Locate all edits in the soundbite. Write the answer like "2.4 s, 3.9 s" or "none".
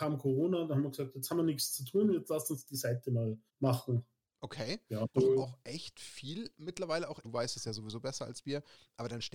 3.5 s, 5.1 s, 7.2 s